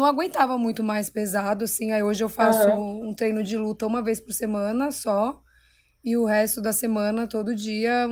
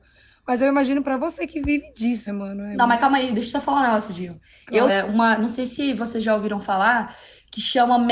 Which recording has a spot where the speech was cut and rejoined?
second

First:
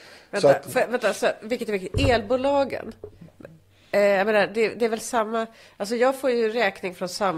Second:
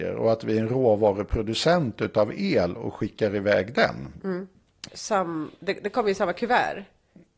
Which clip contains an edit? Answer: second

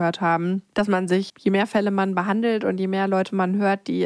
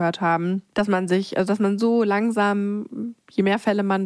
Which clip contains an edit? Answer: first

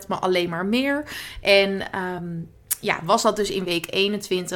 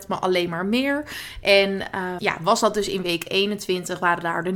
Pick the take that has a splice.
second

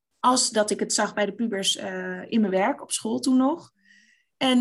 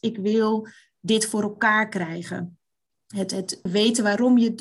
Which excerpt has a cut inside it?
second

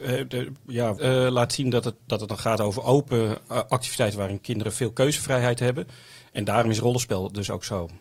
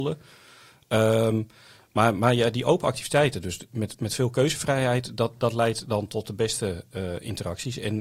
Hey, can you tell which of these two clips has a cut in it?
first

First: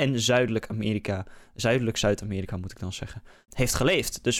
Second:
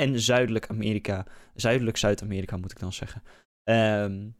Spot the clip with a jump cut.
first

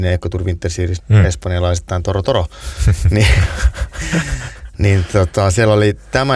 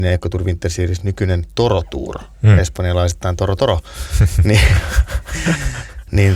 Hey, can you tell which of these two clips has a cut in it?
first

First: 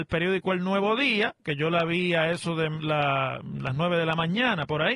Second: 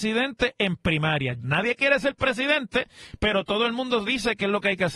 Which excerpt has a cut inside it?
second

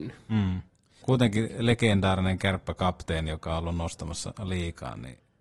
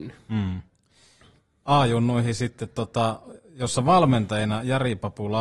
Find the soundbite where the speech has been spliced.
first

